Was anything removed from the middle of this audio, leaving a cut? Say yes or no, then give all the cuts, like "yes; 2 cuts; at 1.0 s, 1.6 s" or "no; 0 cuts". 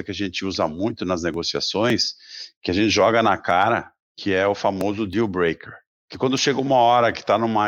no; 0 cuts